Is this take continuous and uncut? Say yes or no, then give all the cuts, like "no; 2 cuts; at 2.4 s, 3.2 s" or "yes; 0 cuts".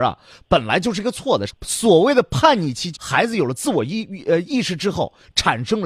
no; 2 cuts; at 1.5 s, 2.9 s